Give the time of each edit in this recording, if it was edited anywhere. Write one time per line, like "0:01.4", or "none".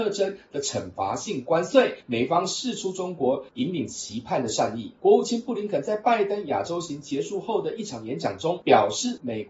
0:05.0